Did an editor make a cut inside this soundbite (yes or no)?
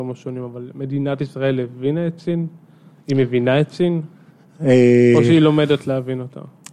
no